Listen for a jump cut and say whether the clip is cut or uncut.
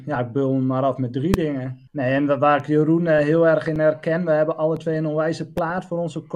cut